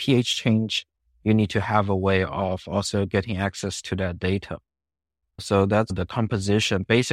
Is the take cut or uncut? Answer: uncut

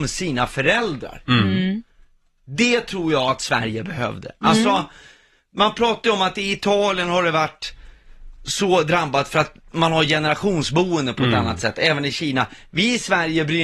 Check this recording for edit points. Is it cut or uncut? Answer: uncut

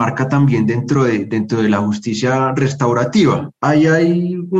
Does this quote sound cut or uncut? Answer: cut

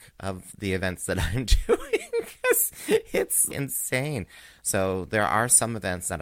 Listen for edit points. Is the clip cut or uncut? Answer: cut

